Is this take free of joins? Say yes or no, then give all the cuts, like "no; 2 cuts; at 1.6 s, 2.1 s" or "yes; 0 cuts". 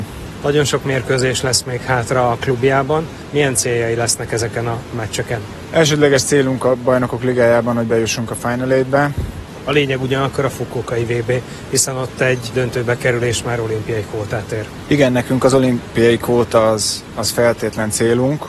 no; 1 cut; at 9.6 s